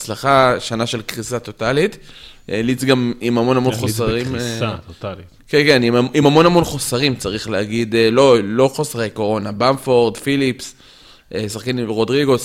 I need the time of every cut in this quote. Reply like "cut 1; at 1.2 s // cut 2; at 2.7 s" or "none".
none